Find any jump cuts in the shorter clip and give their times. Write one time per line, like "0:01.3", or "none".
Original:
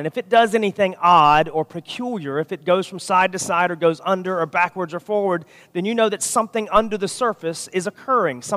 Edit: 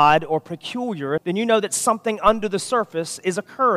0:01.2